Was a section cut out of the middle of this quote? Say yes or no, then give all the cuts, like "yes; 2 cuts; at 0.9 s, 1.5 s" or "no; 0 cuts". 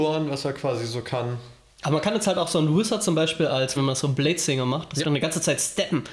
yes; 2 cuts; at 3.8 s, 5.0 s